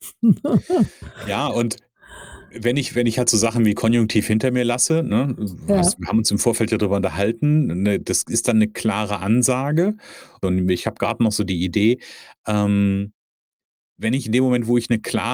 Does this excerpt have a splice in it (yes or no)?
yes